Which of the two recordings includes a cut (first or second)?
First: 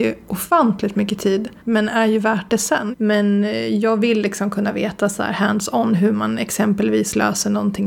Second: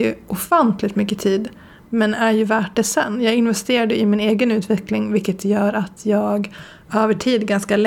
first